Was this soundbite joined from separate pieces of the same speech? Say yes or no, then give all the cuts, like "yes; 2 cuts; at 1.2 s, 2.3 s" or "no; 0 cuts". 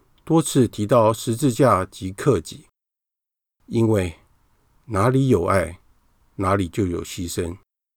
no; 0 cuts